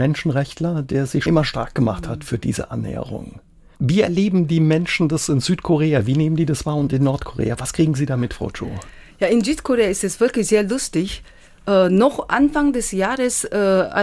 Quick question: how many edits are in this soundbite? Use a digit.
1